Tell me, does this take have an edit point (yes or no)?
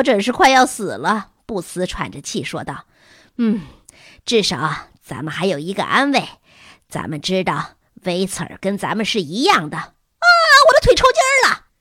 no